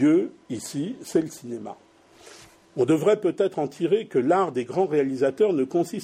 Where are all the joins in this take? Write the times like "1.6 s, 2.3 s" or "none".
none